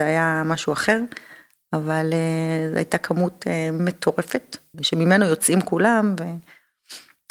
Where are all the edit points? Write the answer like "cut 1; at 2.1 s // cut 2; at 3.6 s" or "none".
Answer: cut 1; at 4.7 s